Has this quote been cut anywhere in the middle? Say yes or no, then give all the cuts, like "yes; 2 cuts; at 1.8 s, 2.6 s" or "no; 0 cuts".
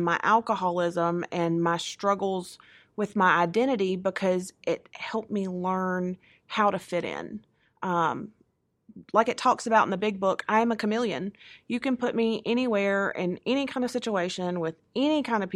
no; 0 cuts